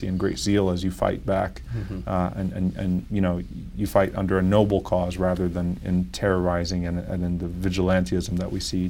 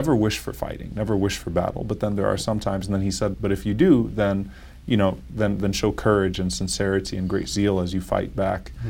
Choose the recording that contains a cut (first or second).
second